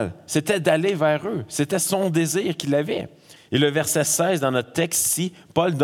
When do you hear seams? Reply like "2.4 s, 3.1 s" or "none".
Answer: 3.4 s